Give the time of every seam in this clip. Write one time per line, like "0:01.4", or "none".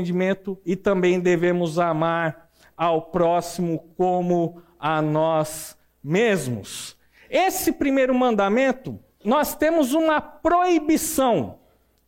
0:09.2